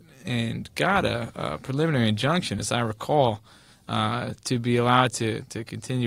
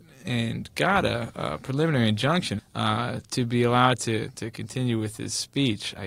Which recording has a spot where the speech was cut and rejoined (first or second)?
second